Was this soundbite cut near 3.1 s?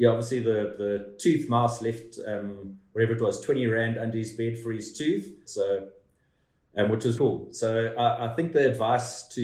no; 2 cuts; at 5.5 s, 7.2 s

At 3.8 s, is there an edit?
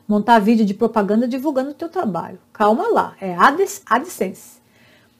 yes; 1 cut; at 3.8 s

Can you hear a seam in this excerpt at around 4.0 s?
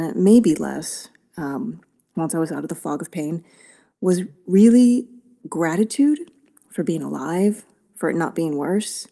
no; 0 cuts

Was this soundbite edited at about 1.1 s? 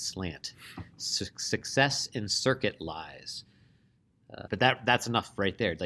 no; 1 cut; at 4.5 s

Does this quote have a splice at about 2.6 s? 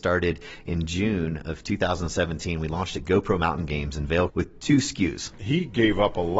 no; 2 cuts; at 4.3 s, 5.3 s

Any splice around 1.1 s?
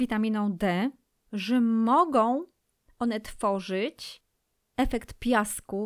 yes; 1 cut; at 1.1 s

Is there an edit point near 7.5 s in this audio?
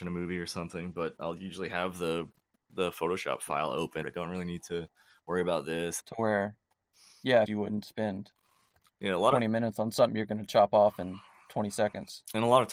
yes; 3 cuts; at 4.0 s, 6.0 s, 7.5 s

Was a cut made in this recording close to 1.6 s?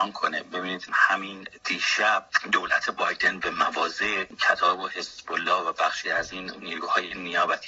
yes; 2 cuts; at 1.6 s, 3.4 s

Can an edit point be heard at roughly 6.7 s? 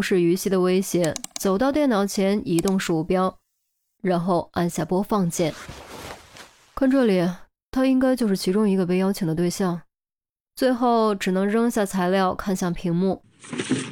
no; 2 cuts; at 4.0 s, 10.4 s

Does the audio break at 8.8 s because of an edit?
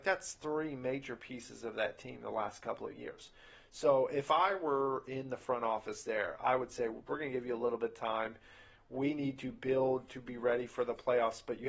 no; 1 cut; at 7.1 s

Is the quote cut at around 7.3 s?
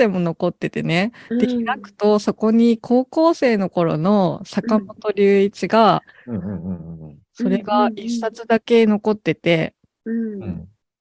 yes; 2 cuts; at 6.1 s, 7.3 s

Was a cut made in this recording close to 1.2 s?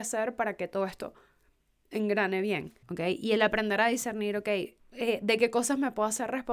no; 2 cuts; at 2.8 s, 4.8 s

